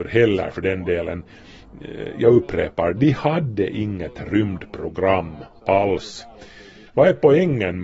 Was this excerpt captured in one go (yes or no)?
no